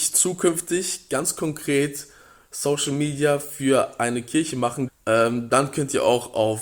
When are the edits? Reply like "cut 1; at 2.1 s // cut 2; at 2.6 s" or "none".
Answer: cut 1; at 4.9 s